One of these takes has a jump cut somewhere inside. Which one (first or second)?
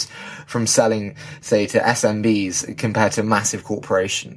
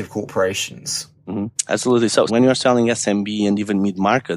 second